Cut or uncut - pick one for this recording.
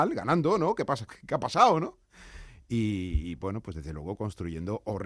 cut